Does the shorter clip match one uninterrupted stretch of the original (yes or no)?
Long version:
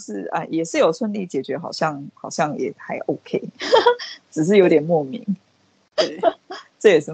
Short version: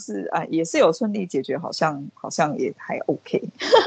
yes